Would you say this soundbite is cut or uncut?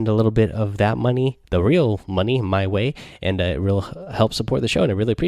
uncut